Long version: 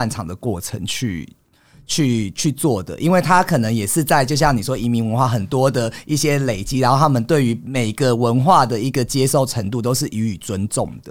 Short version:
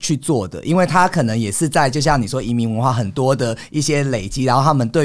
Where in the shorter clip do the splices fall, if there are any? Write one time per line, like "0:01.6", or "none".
none